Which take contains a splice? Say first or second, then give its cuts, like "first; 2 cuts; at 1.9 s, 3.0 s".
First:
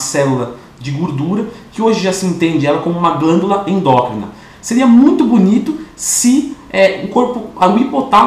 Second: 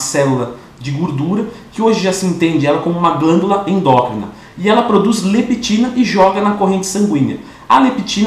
first; 1 cut; at 4.5 s